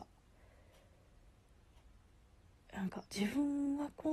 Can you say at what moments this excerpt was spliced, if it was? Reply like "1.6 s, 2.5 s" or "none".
3.1 s